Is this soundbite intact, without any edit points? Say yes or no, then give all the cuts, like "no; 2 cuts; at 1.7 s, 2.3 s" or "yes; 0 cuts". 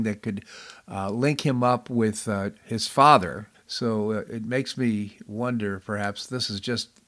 no; 1 cut; at 3.5 s